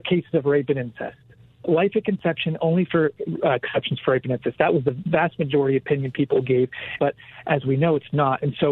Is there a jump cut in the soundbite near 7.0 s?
yes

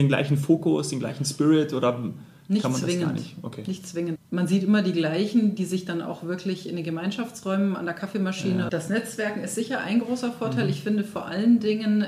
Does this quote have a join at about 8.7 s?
yes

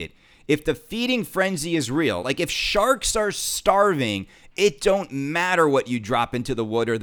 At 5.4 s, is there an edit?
no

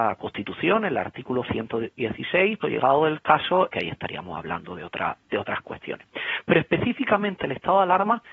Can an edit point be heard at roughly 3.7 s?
yes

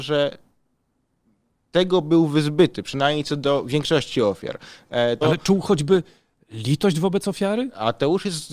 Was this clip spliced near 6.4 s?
no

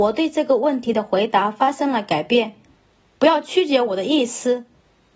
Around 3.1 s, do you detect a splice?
yes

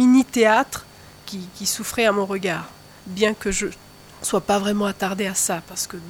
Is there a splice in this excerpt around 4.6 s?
no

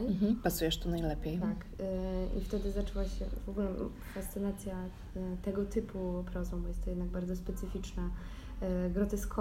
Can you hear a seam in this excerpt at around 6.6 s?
no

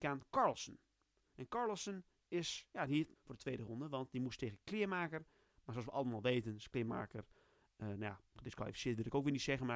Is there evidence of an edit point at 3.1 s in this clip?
yes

